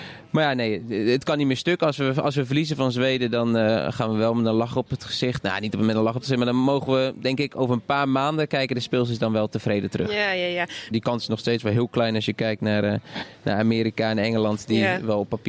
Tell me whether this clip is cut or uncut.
cut